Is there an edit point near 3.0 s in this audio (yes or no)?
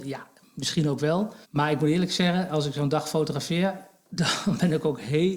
no